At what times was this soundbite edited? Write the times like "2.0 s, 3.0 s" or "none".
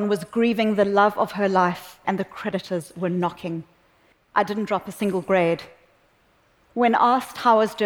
2.0 s, 4.1 s